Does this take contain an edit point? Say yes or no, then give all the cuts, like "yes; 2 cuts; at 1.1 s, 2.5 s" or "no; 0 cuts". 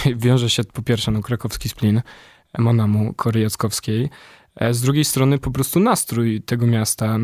no; 0 cuts